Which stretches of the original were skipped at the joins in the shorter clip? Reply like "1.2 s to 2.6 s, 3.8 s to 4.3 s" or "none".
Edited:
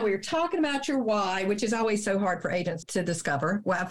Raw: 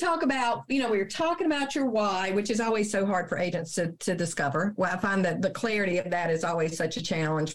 3.7 s to 3.9 s